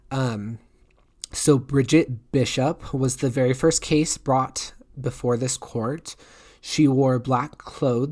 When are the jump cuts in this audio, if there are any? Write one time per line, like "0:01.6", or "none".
none